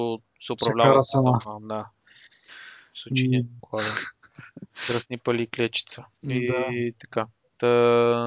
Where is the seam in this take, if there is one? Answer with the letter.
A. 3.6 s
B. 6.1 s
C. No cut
A